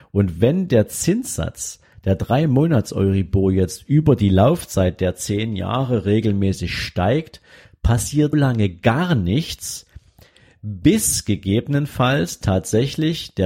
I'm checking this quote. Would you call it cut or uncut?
cut